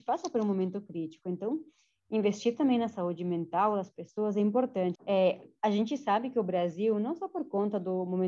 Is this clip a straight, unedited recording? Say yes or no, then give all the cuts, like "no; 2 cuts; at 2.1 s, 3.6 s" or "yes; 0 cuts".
no; 1 cut; at 5.0 s